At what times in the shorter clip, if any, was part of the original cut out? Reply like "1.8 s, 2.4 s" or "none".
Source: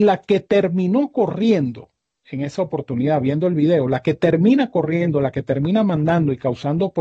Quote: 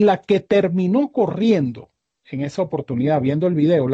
none